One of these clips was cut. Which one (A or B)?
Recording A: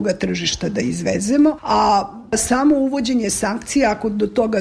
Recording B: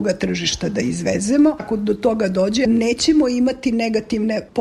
B